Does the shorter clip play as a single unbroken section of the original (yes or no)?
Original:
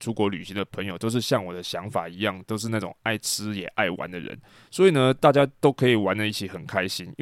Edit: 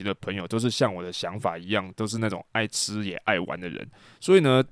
yes